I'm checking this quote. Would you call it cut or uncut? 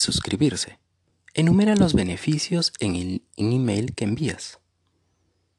uncut